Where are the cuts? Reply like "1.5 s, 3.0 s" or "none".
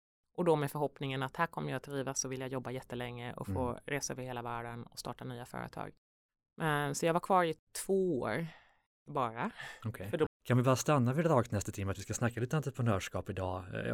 10.3 s